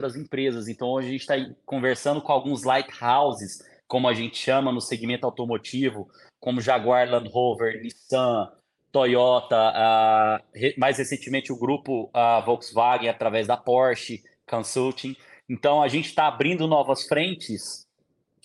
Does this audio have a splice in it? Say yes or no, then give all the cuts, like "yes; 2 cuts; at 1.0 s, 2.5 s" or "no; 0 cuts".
no; 0 cuts